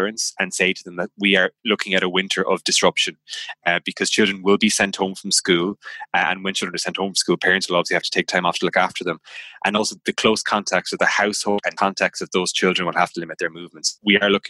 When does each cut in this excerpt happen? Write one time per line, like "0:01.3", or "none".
none